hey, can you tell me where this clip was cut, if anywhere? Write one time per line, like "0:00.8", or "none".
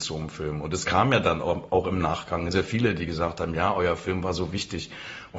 0:02.5

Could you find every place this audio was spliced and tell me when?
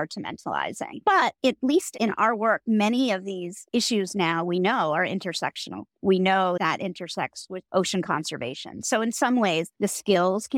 0:05.9

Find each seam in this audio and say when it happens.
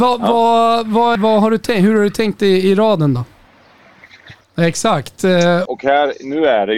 0:01.2
0:04.4
0:05.7

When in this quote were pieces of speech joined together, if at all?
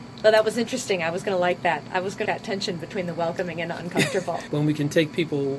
0:02.3
0:04.5

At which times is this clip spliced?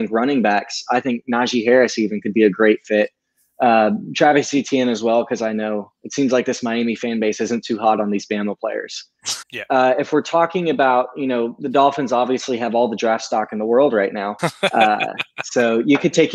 0:09.4
0:14.4

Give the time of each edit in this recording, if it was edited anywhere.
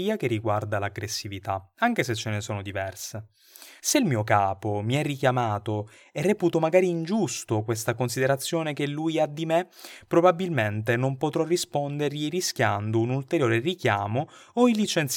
0:03.8

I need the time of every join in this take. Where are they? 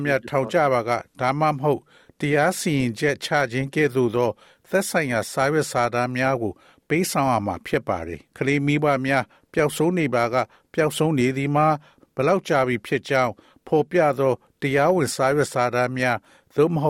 0:08.3

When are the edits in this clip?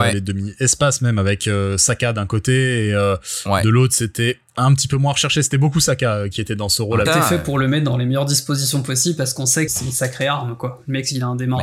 0:07.1
0:09.7

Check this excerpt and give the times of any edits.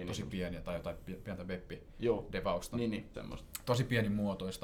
0:03.1

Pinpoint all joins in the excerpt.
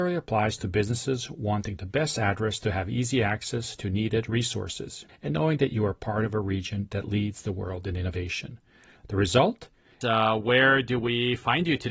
0:05.1
0:10.0

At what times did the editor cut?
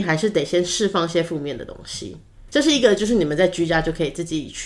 none

